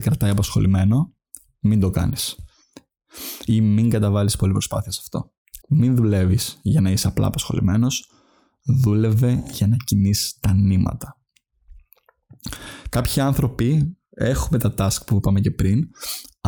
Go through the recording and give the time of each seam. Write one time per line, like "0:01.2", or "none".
0:05.6
0:12.9